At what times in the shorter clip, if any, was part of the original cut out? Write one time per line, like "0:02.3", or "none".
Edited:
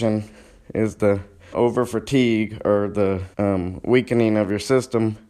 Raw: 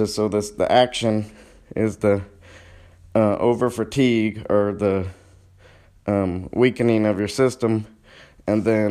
0:01.5
0:03.3